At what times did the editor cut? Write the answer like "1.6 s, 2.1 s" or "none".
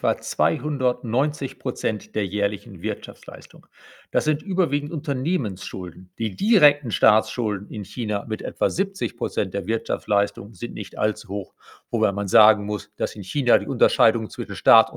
6.1 s